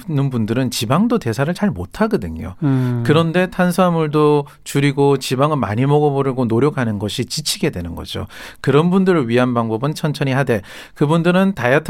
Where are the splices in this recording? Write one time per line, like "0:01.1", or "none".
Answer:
0:09.9